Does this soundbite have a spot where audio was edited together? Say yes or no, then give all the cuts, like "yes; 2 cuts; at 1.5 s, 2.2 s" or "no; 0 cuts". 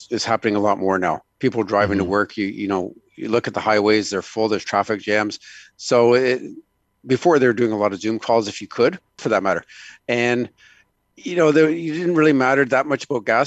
yes; 1 cut; at 9.2 s